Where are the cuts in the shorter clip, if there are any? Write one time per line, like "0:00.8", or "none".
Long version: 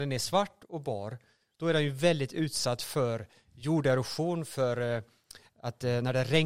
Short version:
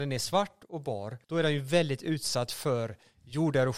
0:01.2